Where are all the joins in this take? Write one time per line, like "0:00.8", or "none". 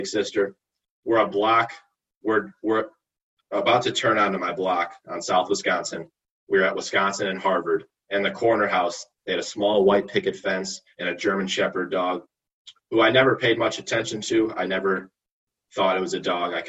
none

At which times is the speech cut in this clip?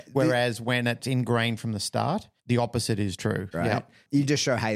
0:02.4
0:03.5

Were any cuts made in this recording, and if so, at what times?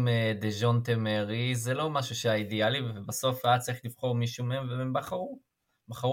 none

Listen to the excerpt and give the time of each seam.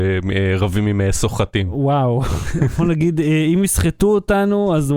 none

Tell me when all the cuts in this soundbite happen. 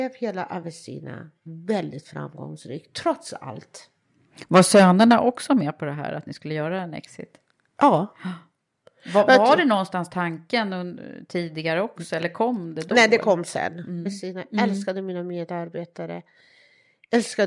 0:14.1

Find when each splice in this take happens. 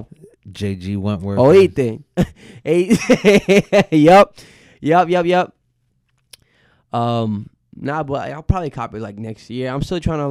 none

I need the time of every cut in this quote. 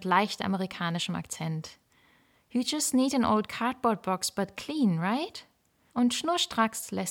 0:05.9

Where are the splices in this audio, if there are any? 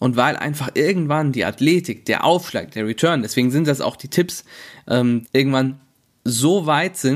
0:05.2

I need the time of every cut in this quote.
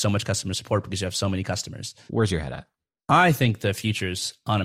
0:02.1

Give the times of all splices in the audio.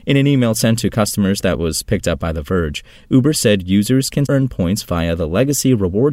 0:04.3

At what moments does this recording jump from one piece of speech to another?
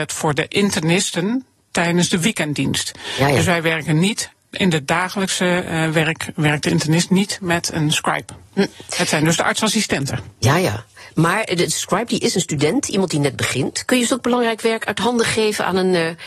none

